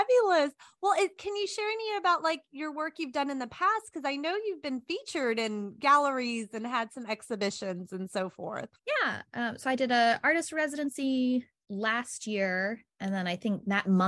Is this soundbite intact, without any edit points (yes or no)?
no